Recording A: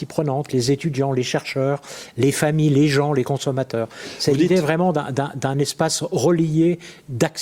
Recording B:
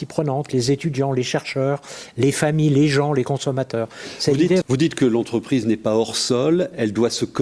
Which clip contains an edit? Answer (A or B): B